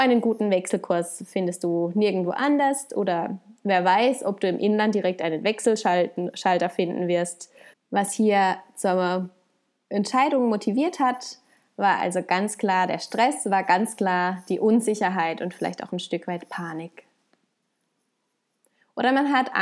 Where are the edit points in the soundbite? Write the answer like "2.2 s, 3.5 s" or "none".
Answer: 7.7 s